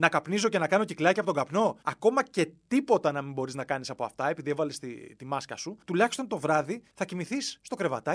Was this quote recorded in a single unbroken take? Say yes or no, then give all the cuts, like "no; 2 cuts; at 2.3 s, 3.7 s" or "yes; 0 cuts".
yes; 0 cuts